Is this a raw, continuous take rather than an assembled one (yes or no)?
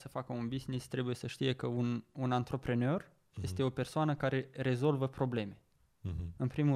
yes